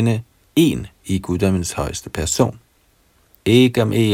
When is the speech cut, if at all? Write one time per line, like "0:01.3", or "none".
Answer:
none